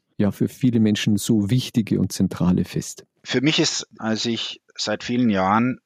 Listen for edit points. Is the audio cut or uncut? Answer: cut